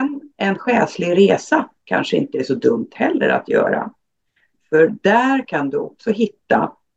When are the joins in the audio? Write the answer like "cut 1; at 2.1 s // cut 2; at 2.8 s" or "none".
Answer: none

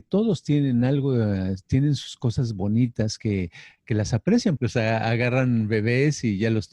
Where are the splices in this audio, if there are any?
cut 1; at 4.6 s

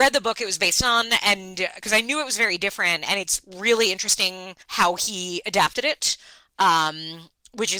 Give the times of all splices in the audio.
cut 1; at 4.6 s

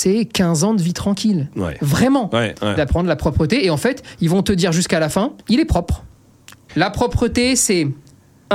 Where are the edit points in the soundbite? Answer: cut 1; at 2.8 s // cut 2; at 5.4 s // cut 3; at 6.7 s

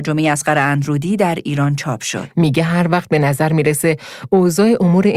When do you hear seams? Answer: cut 1; at 2.3 s

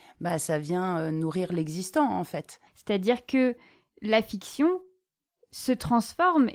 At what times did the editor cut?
cut 1; at 2.7 s

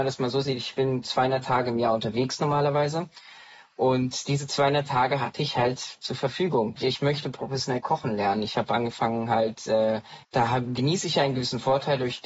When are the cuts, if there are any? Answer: cut 1; at 6.8 s // cut 2; at 10.2 s

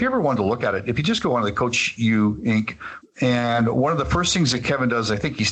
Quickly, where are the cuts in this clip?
cut 1; at 3.0 s

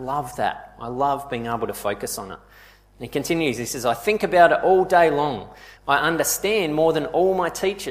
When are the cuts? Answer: cut 1; at 5.8 s

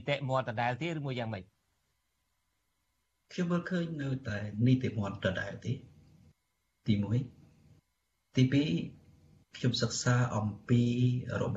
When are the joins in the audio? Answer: none

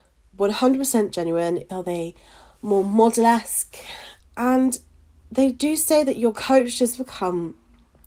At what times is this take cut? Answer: cut 1; at 1.7 s // cut 2; at 4.2 s

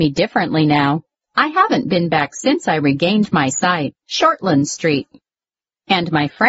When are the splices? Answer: cut 1; at 1.1 s // cut 2; at 4.0 s

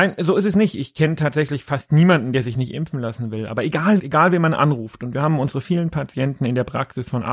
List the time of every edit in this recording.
cut 1; at 4.0 s // cut 2; at 5.6 s

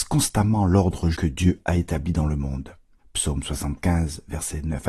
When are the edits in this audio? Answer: cut 1; at 1.1 s // cut 2; at 3.0 s

